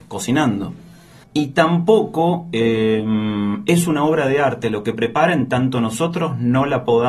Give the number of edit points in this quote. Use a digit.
1